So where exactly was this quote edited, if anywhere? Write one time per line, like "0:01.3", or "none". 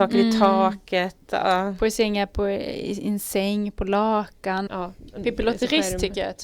0:04.7